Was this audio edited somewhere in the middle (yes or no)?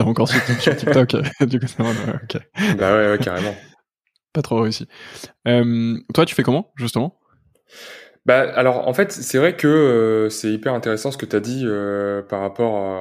no